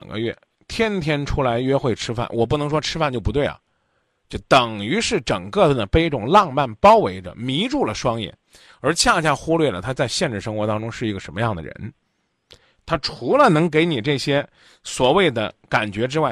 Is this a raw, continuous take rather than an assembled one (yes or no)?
yes